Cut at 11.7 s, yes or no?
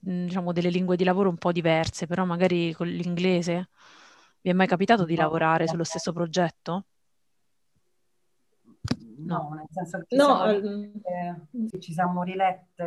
yes